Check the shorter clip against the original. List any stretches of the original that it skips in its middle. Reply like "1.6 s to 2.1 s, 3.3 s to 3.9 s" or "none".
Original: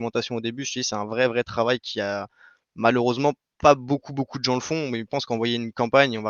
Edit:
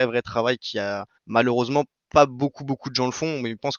2.4 s to 2.6 s